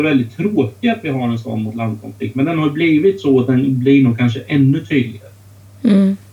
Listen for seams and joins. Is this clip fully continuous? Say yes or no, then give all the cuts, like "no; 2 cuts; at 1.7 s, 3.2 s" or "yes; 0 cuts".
yes; 0 cuts